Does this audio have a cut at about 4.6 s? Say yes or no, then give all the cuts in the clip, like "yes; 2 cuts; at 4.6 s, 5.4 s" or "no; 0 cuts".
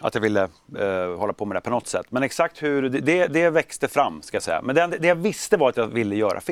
no; 0 cuts